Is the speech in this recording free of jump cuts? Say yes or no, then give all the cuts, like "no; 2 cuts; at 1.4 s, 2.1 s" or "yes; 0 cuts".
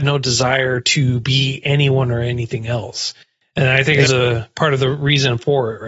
no; 1 cut; at 4.1 s